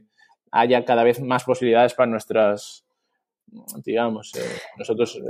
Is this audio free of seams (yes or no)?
no